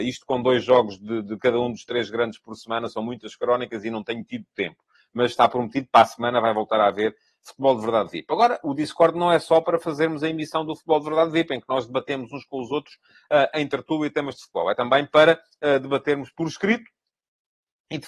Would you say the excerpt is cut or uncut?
uncut